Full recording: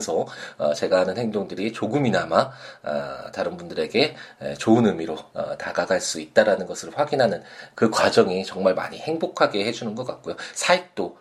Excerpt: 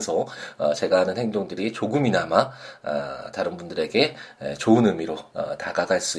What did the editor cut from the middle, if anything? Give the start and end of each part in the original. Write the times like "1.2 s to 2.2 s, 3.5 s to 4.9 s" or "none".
none